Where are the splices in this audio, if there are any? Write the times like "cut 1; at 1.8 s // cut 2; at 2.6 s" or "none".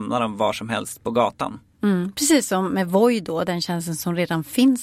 none